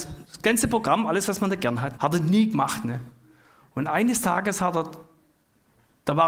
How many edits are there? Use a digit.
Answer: 1